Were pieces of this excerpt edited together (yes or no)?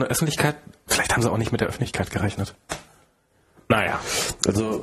no